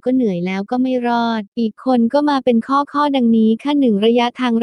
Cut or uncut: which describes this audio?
cut